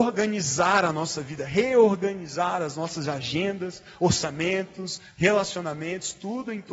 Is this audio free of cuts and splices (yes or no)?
yes